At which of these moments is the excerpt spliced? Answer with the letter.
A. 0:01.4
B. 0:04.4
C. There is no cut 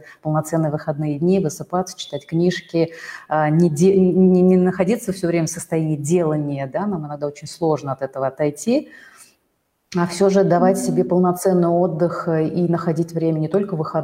C